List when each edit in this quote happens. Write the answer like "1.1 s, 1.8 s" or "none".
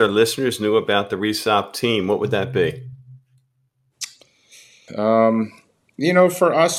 4.9 s

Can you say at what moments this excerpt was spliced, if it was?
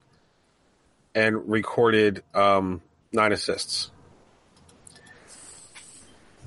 none

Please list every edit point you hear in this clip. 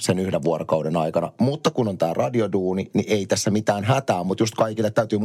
none

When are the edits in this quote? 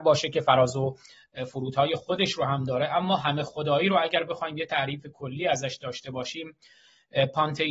none

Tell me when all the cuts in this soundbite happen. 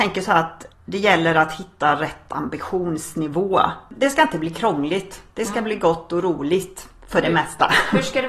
none

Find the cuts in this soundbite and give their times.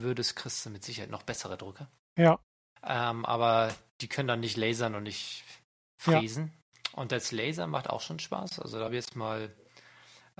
none

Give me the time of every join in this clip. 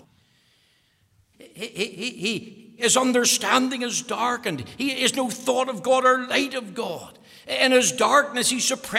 1.3 s, 2.8 s

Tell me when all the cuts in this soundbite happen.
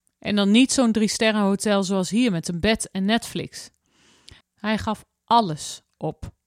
4.4 s

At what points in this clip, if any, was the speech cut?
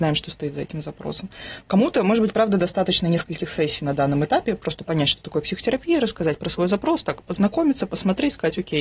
none

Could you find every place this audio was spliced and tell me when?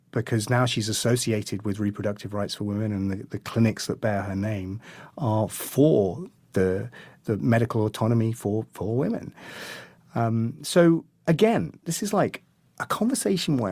none

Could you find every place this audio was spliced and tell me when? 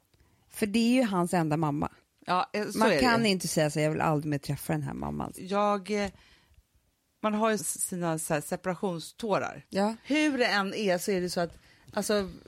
5.3 s, 7.6 s, 10.0 s

